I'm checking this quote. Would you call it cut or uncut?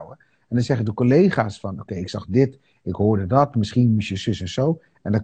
uncut